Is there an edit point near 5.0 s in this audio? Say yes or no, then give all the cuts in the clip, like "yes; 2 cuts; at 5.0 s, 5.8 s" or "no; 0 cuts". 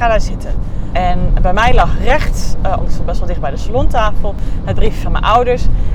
no; 2 cuts; at 0.9 s, 2.8 s